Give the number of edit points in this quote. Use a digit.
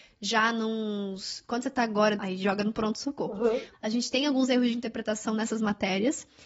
2